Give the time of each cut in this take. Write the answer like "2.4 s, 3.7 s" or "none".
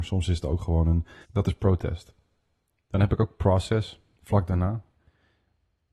1.2 s